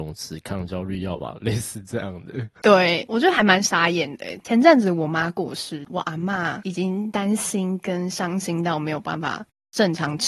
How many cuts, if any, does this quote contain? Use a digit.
1